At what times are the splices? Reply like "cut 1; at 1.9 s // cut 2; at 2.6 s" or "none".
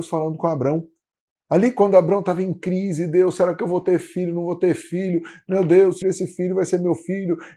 cut 1; at 6.0 s